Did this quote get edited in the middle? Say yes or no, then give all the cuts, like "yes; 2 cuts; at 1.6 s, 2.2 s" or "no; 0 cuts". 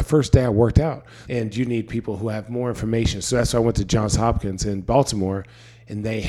yes; 1 cut; at 1.2 s